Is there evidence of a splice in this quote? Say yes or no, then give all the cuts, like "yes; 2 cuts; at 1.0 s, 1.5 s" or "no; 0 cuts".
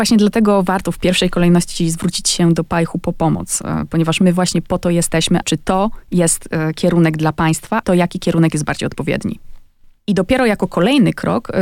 yes; 3 cuts; at 5.4 s, 7.8 s, 10.0 s